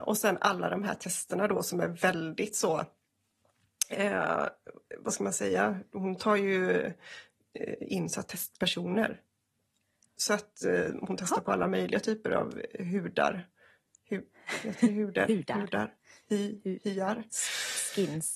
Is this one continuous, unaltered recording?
yes; 0 cuts

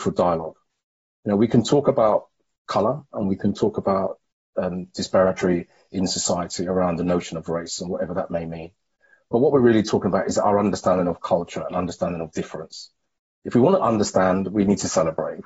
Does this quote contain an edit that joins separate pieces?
no; 0 cuts

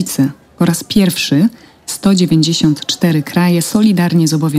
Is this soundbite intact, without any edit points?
yes; 0 cuts

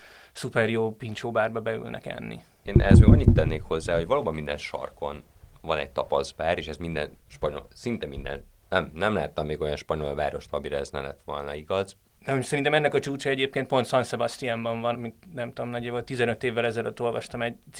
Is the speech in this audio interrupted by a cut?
yes; 3 cuts; at 2.6 s, 12.2 s, 14.9 s

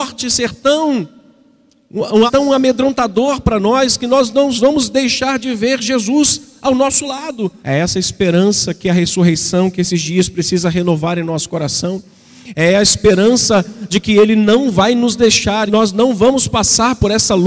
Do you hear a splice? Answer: yes; 3 cuts; at 2.3 s, 7.6 s, 15.7 s

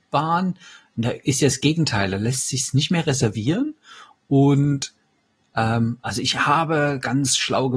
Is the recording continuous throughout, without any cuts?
yes; 0 cuts

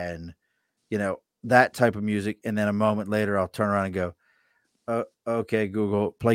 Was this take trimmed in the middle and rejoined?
no; 0 cuts

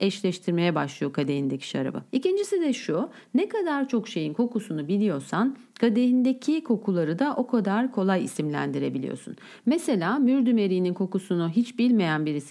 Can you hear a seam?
yes; 1 cut; at 2.1 s

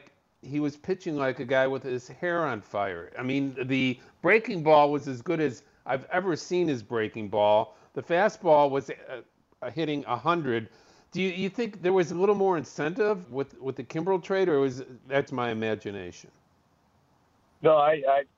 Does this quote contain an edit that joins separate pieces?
yes; 2 cuts; at 13.2 s, 15.3 s

